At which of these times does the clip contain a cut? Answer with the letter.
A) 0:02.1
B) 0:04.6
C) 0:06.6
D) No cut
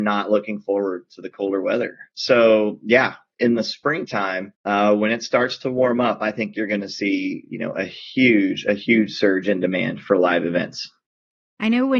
B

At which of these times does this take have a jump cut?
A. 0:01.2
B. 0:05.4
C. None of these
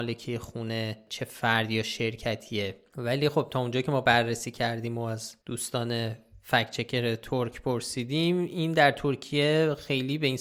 B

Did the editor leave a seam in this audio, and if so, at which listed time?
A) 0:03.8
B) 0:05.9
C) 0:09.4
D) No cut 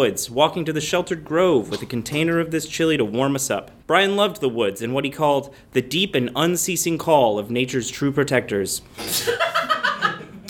A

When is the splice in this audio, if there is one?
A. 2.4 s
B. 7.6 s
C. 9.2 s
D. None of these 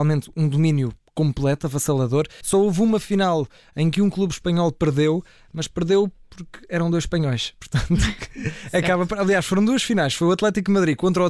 A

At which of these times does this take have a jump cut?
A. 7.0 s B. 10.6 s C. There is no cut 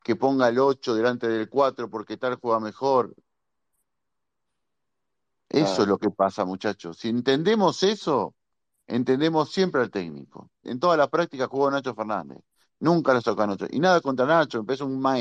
B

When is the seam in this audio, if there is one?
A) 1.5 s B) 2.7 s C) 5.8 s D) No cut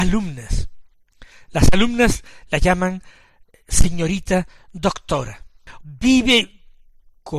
C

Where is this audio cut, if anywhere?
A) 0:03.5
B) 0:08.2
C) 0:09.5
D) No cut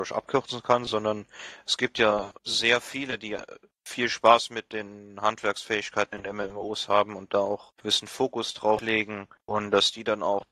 D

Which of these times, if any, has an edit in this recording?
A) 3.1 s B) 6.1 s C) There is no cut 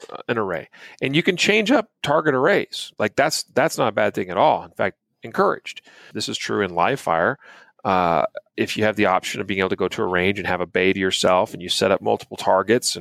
B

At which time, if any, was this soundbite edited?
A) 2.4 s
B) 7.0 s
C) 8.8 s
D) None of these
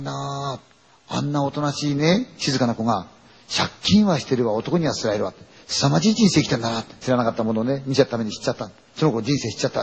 B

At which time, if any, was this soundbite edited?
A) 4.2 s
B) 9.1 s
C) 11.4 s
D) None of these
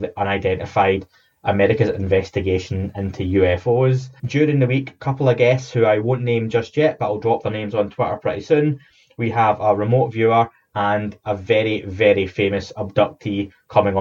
A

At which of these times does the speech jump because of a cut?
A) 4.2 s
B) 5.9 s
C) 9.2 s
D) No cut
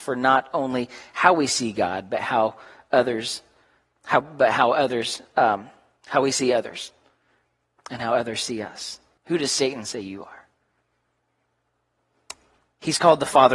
C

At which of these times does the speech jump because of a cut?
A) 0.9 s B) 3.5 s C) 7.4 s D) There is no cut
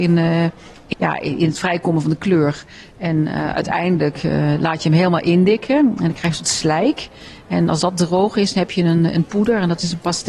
A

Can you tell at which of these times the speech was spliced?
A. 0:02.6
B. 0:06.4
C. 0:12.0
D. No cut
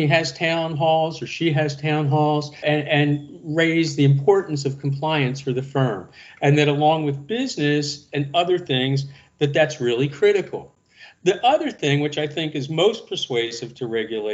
A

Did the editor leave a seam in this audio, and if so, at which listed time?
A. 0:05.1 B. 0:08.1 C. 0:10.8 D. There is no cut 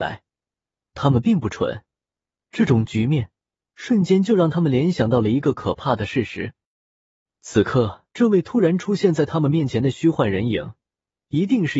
B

